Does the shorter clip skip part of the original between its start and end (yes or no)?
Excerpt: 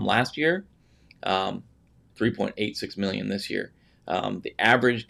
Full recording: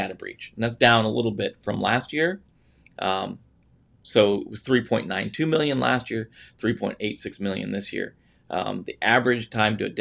yes